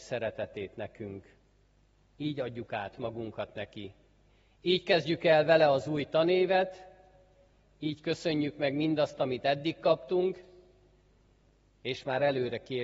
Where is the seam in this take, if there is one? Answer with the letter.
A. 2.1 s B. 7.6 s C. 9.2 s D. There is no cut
A